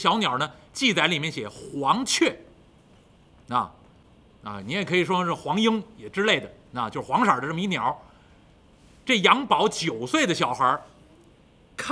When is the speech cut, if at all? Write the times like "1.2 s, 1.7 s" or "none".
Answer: none